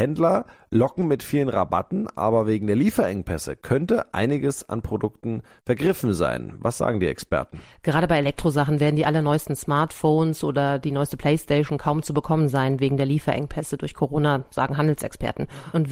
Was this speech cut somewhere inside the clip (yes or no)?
no